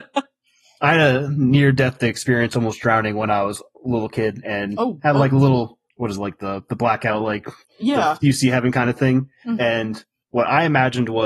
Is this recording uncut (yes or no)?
yes